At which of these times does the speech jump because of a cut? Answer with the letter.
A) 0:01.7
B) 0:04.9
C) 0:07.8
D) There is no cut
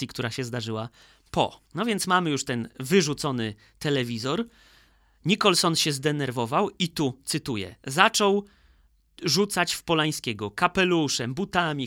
A